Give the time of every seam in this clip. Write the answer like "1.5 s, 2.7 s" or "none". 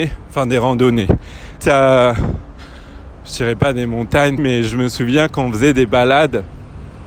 1.6 s, 4.4 s